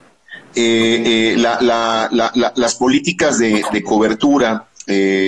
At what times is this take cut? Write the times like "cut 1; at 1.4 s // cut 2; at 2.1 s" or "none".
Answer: none